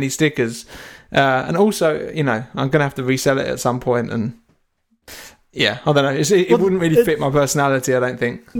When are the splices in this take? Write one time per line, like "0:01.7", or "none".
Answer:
none